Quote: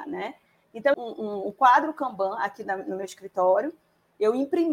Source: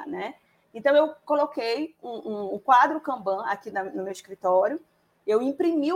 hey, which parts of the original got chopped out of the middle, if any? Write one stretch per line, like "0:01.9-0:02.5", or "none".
0:00.9-0:02.0